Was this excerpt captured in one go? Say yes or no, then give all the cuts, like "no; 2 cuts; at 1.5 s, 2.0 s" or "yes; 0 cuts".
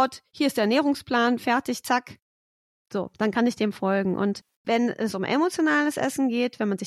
yes; 0 cuts